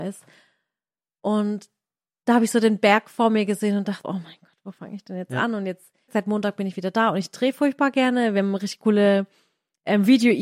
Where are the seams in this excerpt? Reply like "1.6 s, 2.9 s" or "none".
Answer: 4.0 s, 6.1 s